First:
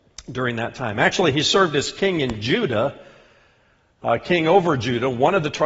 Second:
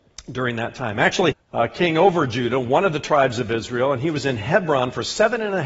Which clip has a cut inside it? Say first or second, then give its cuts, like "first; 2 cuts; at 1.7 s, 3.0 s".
second; 1 cut; at 1.3 s